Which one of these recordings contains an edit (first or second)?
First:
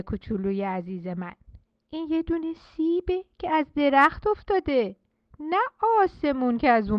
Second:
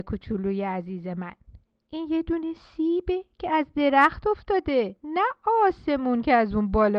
second